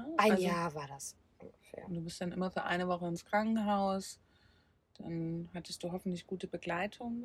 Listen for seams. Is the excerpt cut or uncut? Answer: uncut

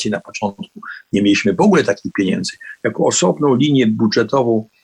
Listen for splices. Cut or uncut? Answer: uncut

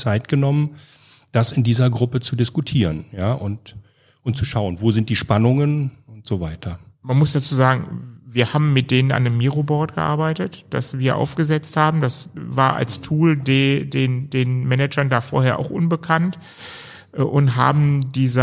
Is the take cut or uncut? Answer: uncut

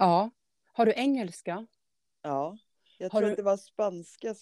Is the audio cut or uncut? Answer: uncut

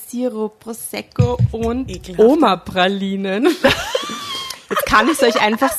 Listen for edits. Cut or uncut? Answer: uncut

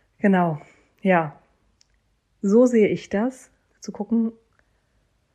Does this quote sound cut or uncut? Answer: cut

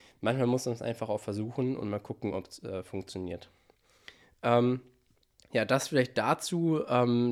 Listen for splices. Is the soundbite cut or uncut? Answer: uncut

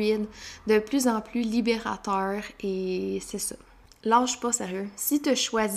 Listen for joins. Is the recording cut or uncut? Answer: uncut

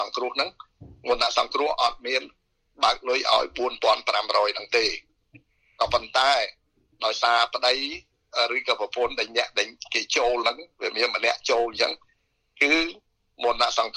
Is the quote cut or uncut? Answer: uncut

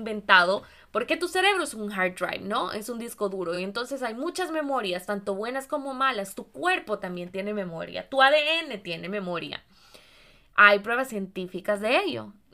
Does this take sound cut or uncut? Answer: uncut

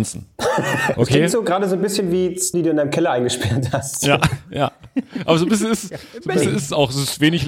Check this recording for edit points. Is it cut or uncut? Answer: cut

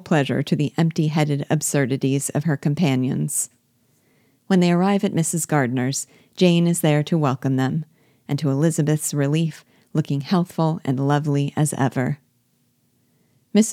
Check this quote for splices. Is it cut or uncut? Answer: uncut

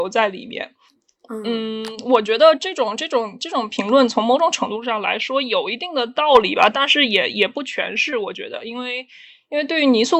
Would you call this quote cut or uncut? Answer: uncut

